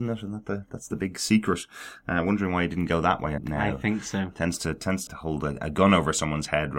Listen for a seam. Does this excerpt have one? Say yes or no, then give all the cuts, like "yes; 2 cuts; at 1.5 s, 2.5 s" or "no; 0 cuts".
yes; 2 cuts; at 3.4 s, 5.1 s